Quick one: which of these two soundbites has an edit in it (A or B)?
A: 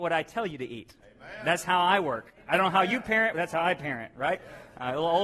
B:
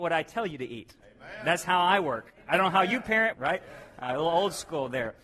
B